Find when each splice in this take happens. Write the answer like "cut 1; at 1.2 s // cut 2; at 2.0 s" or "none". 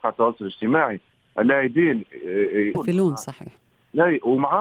cut 1; at 2.7 s